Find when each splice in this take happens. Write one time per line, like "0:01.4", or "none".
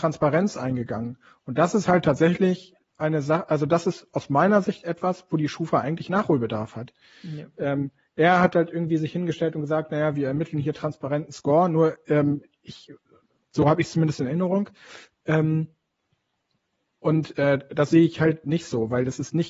none